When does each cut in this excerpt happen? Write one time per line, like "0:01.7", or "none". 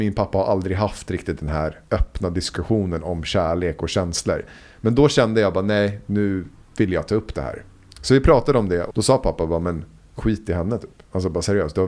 0:08.9